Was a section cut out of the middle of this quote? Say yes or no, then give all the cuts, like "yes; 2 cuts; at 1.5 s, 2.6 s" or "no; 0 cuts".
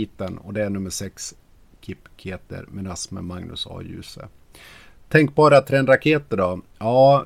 no; 0 cuts